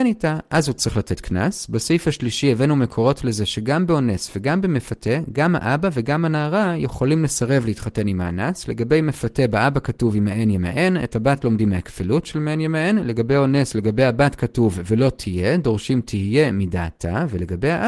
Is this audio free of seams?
yes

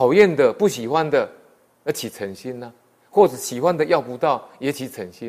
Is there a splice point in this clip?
no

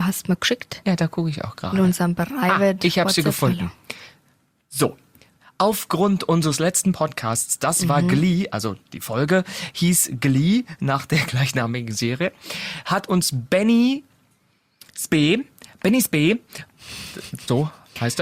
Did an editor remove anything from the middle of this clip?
no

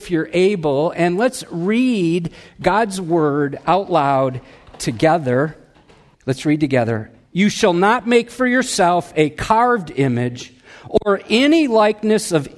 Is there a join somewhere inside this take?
yes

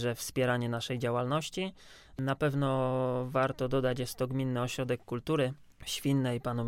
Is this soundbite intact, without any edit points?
no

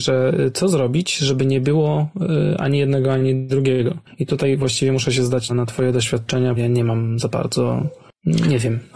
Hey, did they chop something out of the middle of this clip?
yes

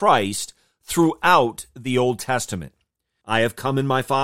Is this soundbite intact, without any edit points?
no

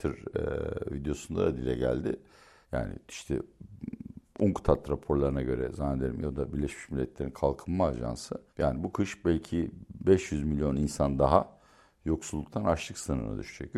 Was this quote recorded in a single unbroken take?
no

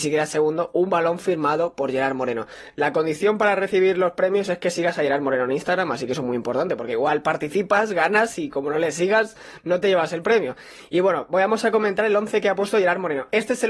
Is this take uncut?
yes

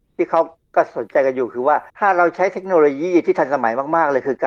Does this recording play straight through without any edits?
no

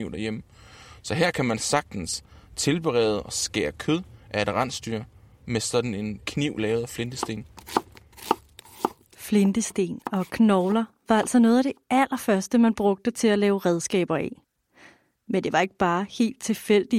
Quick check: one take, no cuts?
yes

